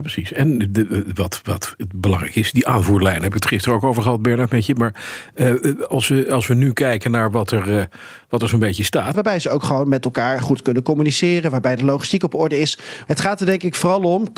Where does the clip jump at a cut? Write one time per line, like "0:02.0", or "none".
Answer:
0:09.1
0:13.1